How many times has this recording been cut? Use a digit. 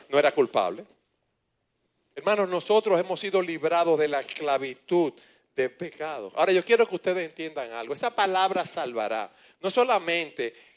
0